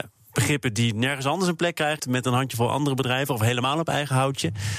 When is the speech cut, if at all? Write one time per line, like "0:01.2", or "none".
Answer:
0:02.0